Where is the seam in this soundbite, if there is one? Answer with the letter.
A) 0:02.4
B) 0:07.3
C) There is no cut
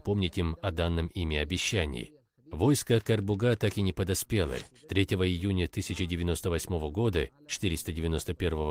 C